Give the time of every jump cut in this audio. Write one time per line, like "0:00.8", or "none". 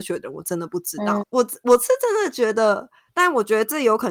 0:01.2
0:03.1